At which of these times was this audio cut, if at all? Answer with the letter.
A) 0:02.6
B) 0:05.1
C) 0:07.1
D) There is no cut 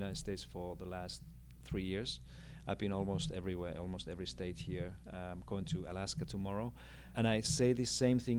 C